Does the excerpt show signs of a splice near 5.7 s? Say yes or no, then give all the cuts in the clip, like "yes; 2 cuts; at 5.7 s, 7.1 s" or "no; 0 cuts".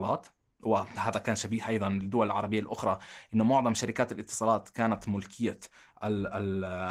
no; 0 cuts